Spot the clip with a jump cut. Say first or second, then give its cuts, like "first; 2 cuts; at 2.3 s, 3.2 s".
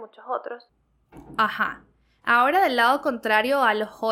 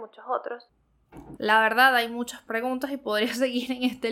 second; 1 cut; at 1.4 s